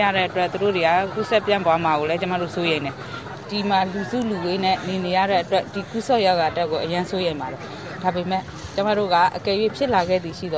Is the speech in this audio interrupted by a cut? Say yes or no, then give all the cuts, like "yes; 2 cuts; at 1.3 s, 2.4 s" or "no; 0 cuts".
no; 0 cuts